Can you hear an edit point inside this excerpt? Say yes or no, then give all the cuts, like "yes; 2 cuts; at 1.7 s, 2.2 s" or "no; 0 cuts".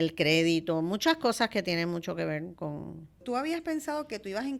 yes; 1 cut; at 3.2 s